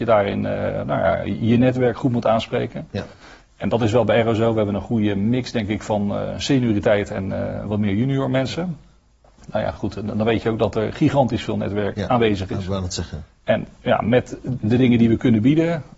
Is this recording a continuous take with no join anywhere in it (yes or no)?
yes